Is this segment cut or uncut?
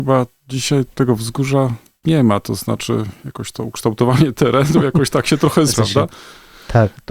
cut